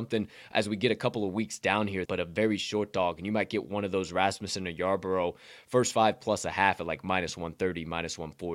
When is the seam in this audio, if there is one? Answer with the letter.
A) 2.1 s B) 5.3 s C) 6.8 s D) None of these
A